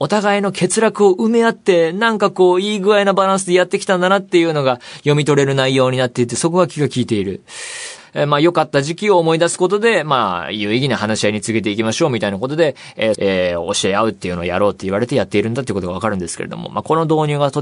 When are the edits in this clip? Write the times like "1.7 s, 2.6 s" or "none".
8.0 s, 13.1 s